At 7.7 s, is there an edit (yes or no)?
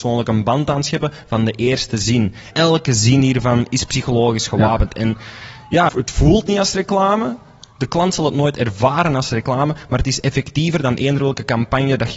no